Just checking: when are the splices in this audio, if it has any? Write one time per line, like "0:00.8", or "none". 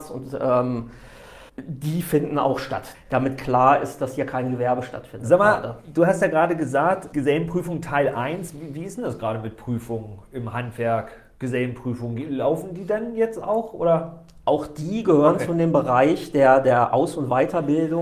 0:01.5
0:02.9
0:07.1